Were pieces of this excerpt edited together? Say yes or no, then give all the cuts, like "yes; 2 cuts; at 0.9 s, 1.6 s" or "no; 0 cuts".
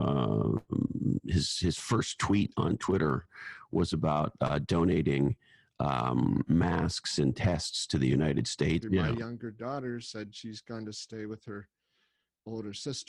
yes; 1 cut; at 8.8 s